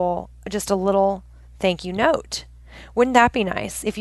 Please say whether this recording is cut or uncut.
uncut